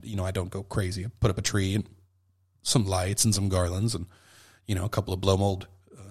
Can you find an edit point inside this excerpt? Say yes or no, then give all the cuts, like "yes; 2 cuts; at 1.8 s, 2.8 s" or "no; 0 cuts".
no; 0 cuts